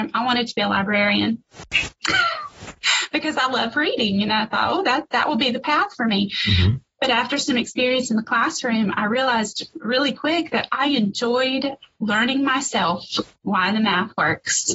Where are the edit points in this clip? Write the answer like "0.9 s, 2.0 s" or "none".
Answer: none